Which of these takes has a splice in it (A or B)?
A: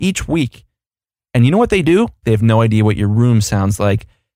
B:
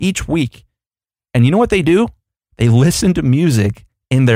A